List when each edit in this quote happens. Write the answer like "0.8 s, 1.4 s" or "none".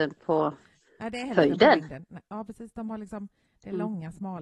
2.3 s